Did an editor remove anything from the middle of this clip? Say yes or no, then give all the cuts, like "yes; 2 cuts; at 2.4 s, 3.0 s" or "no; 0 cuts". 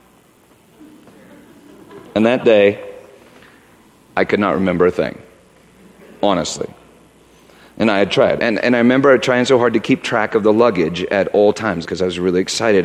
yes; 2 cuts; at 8.4 s, 11.8 s